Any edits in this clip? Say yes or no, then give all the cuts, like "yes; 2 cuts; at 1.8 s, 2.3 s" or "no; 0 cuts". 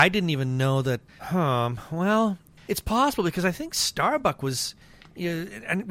no; 0 cuts